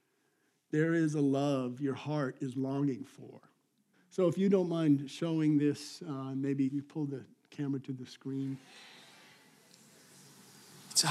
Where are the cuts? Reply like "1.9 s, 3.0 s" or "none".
3.9 s, 6.7 s